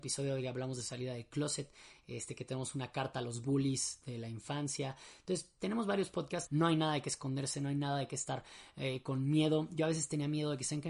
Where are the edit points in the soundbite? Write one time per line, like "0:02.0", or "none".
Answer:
0:06.5
0:07.5